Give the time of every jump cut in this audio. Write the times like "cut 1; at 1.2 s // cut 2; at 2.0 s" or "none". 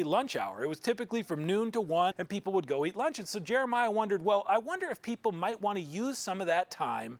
cut 1; at 2.1 s